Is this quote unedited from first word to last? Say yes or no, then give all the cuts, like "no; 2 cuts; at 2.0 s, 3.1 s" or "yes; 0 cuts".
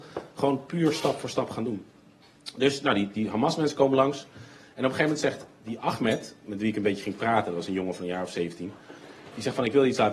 yes; 0 cuts